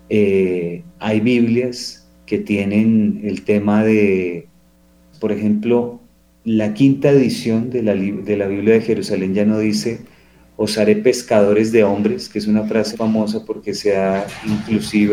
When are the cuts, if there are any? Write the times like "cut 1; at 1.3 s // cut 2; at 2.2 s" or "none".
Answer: cut 1; at 5.1 s // cut 2; at 12.9 s